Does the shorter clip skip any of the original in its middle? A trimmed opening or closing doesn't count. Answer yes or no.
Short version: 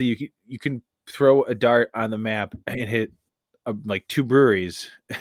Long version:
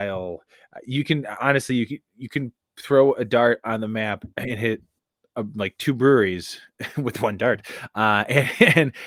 no